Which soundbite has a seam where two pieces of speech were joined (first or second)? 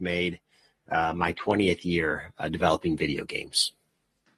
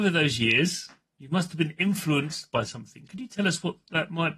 second